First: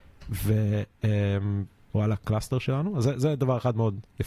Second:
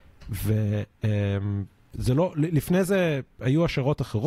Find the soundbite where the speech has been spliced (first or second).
first